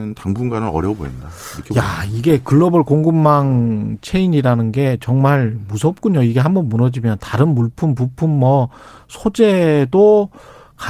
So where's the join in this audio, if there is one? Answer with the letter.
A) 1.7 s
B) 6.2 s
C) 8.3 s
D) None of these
D